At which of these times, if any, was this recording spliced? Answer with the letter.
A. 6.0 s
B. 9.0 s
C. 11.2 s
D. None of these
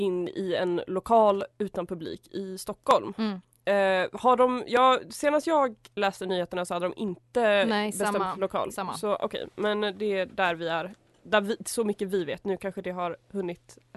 A